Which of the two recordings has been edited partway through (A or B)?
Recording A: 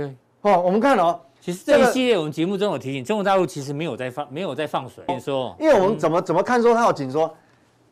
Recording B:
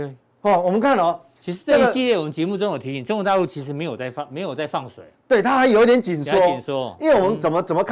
A